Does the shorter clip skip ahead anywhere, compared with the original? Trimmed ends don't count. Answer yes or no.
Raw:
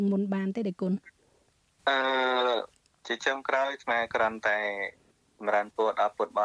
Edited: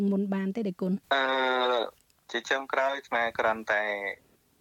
yes